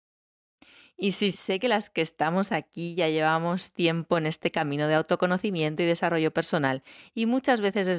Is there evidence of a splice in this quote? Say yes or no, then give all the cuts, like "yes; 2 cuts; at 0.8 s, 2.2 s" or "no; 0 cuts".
yes; 1 cut; at 1.3 s